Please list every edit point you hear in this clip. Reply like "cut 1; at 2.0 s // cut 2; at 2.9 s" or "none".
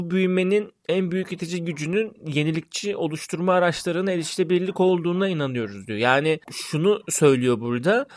none